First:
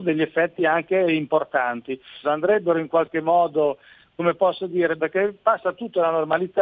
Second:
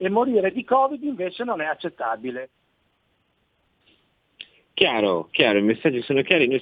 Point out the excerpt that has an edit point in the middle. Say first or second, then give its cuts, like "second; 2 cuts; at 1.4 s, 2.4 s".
first; 2 cuts; at 2.2 s, 5.0 s